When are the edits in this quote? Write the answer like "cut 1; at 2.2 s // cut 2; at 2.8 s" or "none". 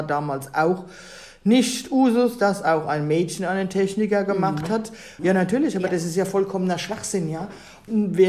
cut 1; at 5.2 s

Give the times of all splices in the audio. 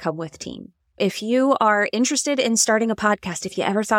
cut 1; at 1.0 s

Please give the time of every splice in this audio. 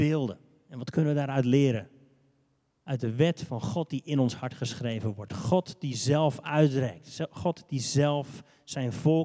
none

